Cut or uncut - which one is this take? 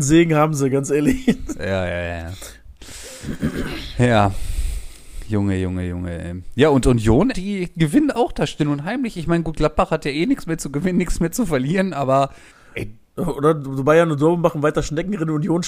cut